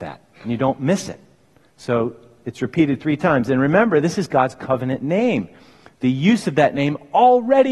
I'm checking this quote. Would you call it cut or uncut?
uncut